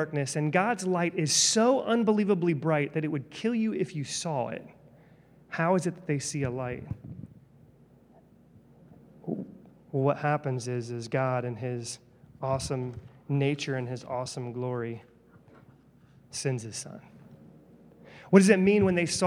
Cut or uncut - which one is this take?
uncut